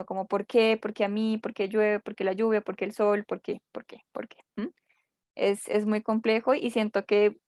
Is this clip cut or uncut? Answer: uncut